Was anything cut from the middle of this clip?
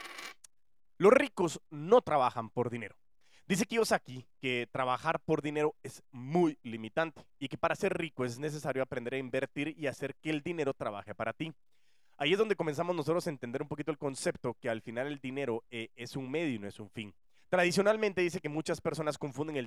yes; 1 cut; at 17.4 s

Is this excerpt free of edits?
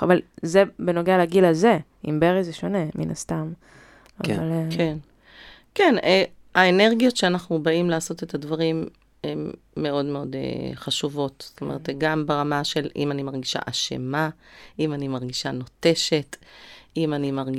yes; 0 cuts

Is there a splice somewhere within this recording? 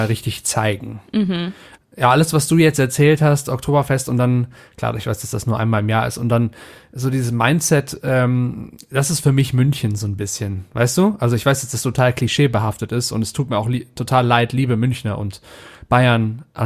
yes; 1 cut; at 1.8 s

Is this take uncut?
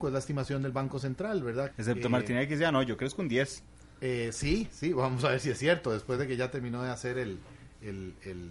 no; 1 cut; at 1.7 s

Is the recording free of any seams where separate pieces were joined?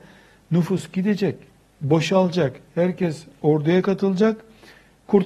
yes; 0 cuts

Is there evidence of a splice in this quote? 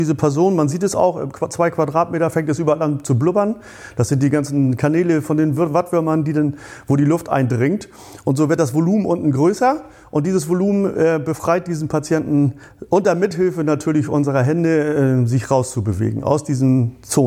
no; 0 cuts

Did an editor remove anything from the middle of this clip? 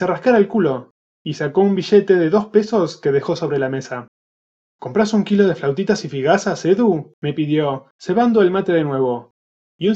no; 0 cuts

